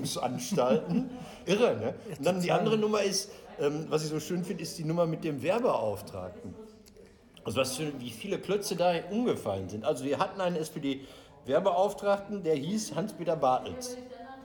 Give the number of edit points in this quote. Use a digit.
1